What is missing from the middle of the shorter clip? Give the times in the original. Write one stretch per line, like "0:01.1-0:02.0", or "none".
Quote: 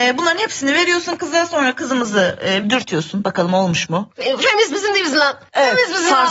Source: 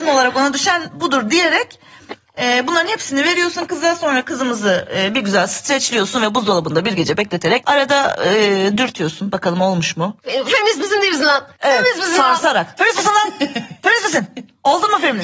0:05.1-0:08.7